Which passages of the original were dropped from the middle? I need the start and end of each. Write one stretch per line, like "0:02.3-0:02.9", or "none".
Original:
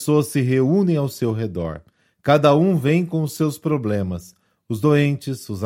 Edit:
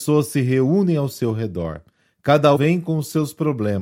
0:02.6-0:02.8